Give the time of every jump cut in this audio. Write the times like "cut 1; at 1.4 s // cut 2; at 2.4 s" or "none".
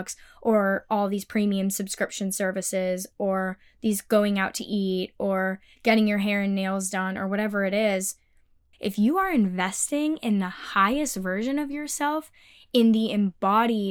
cut 1; at 8.7 s